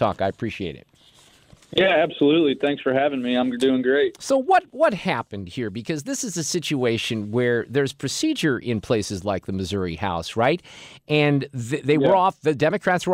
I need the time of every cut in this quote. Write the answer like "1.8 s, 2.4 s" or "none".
none

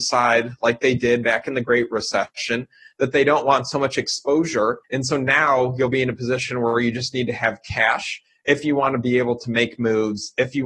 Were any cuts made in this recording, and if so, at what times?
4.8 s

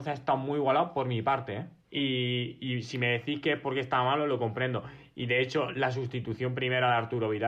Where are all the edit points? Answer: 1.8 s

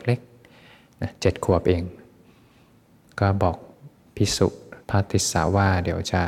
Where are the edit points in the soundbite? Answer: 4.8 s

